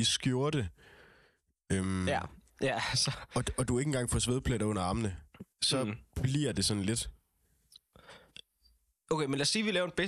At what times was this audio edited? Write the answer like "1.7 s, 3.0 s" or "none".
5.5 s